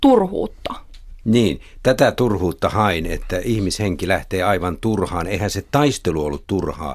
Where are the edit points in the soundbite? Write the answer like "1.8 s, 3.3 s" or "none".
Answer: none